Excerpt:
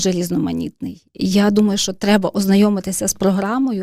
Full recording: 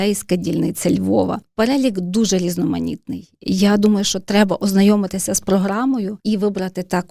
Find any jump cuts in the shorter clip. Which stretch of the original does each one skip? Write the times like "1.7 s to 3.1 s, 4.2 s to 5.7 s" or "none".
none